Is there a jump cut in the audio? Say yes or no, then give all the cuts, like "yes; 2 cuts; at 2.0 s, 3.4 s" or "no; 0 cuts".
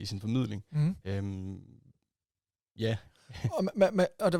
no; 0 cuts